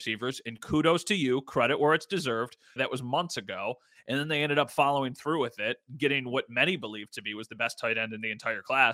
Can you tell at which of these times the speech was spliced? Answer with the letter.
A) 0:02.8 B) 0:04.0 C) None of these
A